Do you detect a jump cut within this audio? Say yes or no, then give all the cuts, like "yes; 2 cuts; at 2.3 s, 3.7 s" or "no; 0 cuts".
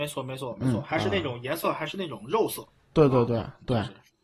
no; 0 cuts